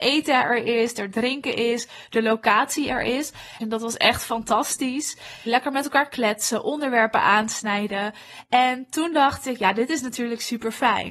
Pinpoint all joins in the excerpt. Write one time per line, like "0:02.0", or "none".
0:03.6
0:05.5